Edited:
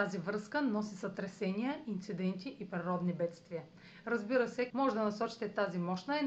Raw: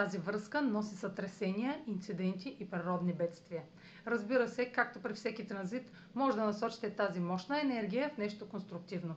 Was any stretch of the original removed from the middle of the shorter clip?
yes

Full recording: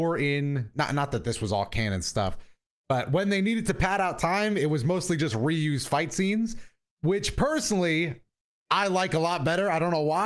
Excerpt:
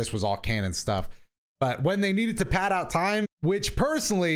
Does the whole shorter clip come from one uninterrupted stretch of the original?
no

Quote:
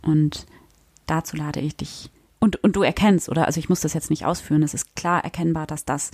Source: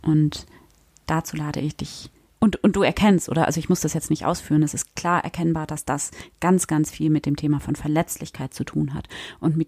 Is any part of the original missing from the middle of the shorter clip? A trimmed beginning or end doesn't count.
no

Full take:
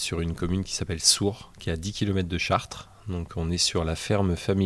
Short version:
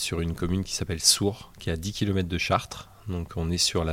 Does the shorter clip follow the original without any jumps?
yes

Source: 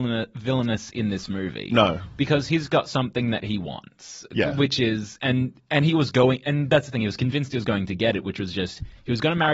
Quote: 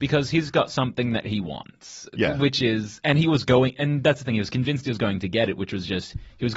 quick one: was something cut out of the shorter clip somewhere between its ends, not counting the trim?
yes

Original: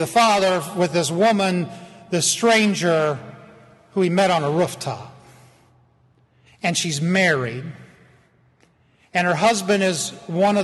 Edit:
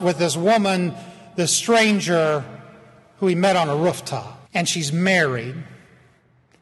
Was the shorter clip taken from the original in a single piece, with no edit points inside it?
no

